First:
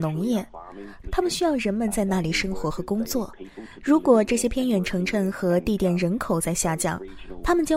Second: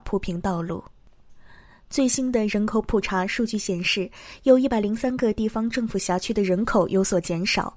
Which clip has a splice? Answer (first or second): first